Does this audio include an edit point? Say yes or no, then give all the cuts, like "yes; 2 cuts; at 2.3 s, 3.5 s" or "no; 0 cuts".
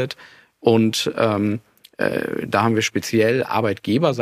no; 0 cuts